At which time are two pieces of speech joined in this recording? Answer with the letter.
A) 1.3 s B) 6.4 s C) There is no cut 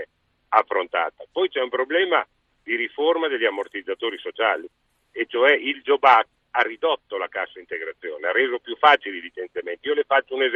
B